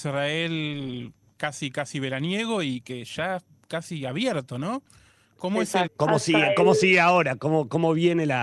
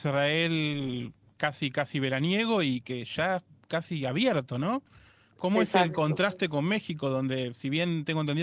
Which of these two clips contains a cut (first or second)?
first